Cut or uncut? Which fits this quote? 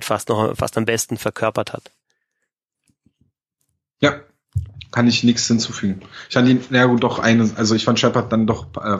uncut